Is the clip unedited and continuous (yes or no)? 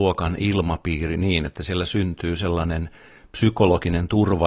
yes